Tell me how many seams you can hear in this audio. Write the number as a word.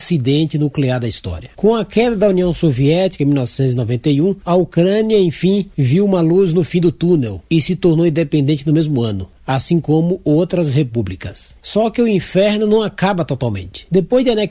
zero